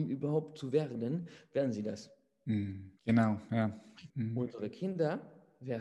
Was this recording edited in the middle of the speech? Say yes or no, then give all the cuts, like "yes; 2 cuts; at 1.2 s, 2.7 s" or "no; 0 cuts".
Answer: yes; 2 cuts; at 3.0 s, 4.1 s